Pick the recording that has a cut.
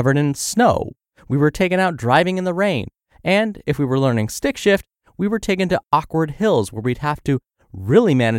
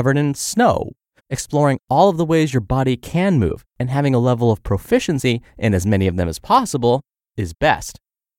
second; 1 cut; at 1.2 s

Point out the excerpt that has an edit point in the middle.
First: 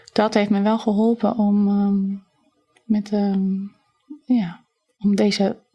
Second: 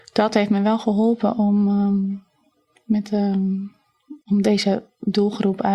second; 1 cut; at 4.2 s

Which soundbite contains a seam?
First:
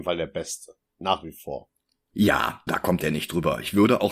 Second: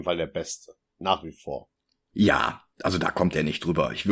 first; 1 cut; at 2.7 s

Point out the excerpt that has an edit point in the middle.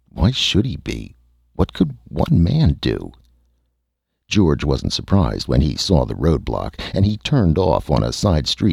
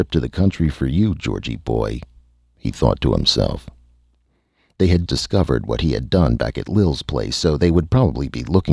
second; 1 cut; at 5.1 s

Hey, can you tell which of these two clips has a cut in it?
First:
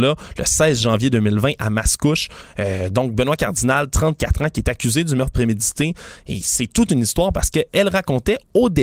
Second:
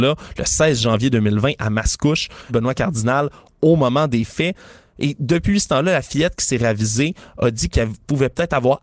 second; 1 cut; at 2.5 s

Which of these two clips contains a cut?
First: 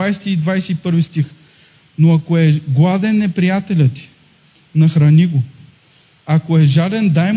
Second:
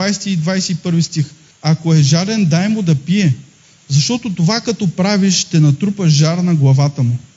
second; 1 cut; at 1.5 s

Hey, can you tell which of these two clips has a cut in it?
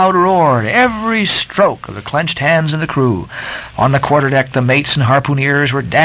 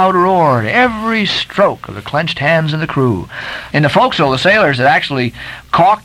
second; 1 cut; at 3.7 s

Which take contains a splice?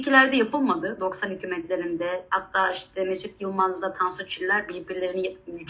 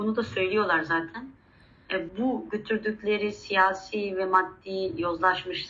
second; 1 cut; at 2.1 s

